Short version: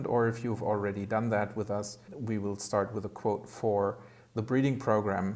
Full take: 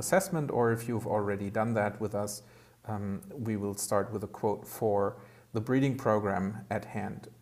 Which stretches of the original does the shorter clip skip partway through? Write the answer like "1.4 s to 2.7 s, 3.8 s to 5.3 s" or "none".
2.5 s to 3.3 s